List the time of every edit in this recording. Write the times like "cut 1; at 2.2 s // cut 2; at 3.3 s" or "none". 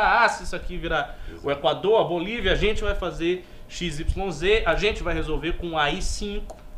none